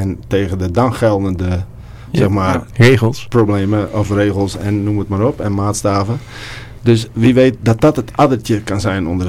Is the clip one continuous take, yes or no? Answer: yes